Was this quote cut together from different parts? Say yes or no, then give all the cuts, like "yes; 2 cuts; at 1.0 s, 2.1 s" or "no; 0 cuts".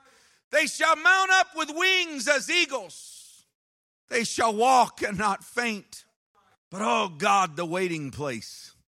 yes; 2 cuts; at 3.9 s, 6.5 s